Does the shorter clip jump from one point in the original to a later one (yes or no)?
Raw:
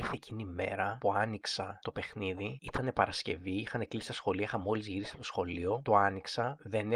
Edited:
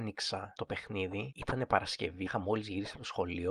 yes